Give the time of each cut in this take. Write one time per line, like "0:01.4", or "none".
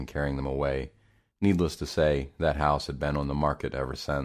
none